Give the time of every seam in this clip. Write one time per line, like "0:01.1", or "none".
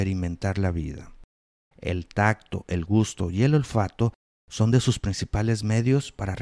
0:01.7